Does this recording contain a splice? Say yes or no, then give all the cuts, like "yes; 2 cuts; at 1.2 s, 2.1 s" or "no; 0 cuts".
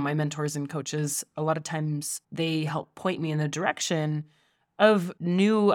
no; 0 cuts